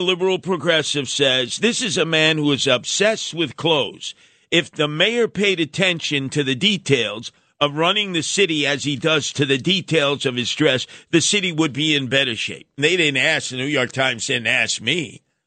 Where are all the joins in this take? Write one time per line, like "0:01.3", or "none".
0:12.8